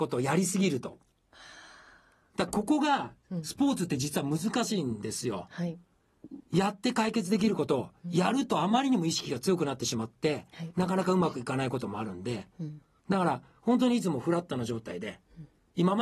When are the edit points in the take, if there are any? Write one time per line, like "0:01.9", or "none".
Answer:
none